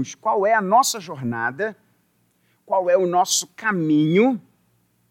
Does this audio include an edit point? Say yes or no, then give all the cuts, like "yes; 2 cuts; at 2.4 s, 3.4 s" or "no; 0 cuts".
no; 0 cuts